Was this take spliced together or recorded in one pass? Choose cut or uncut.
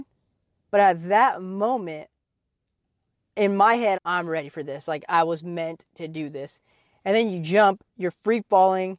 cut